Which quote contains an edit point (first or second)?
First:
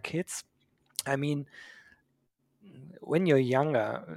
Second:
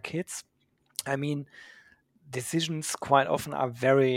second